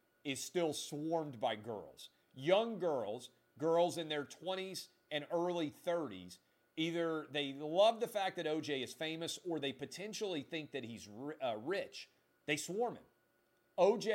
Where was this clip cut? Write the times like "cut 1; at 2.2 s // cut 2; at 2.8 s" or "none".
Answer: cut 1; at 2.2 s